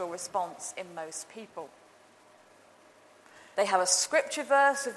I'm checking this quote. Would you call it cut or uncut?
cut